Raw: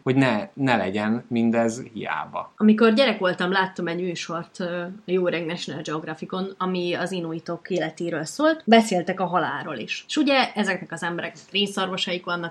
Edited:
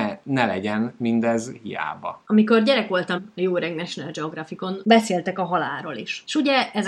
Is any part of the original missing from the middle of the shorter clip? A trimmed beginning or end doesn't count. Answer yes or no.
yes